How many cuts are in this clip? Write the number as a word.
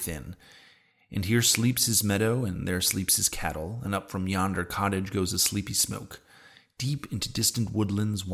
zero